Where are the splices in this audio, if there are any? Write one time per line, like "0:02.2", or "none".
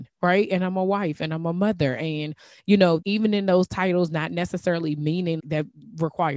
0:03.0
0:05.4